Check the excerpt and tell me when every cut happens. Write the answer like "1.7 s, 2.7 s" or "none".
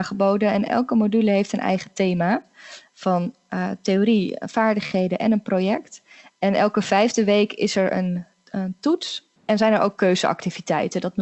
none